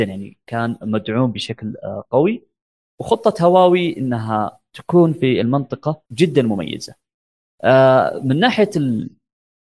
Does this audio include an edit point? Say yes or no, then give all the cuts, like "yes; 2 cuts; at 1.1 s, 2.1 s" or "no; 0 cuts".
yes; 1 cut; at 6.1 s